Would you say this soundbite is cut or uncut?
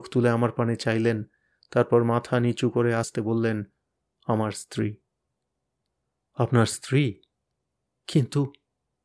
cut